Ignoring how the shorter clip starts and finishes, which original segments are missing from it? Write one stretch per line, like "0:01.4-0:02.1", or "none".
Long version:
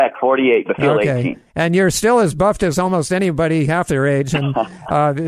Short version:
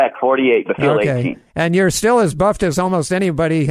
none